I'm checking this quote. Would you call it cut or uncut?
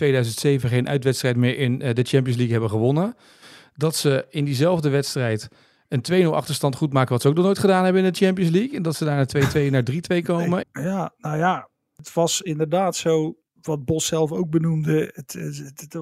cut